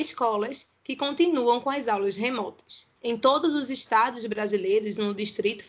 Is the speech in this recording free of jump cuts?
no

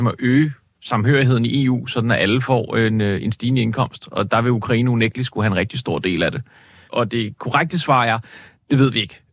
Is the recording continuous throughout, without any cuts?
no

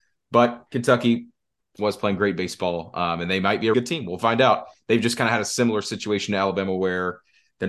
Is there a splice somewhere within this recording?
yes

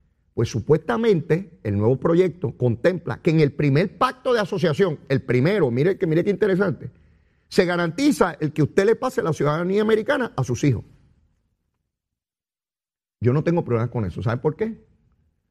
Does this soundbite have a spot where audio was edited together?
no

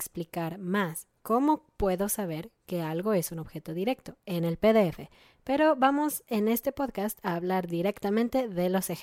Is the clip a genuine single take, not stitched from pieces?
no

